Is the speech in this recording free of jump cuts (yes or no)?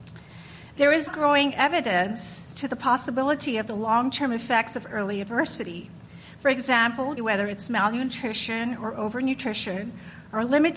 no